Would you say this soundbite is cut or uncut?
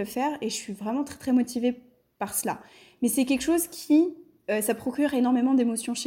uncut